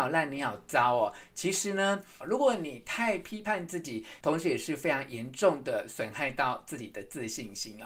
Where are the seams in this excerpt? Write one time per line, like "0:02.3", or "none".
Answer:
0:02.2
0:04.2